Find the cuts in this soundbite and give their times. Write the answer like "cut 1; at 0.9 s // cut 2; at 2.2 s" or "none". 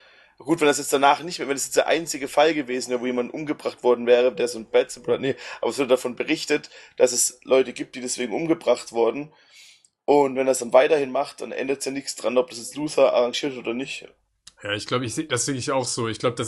none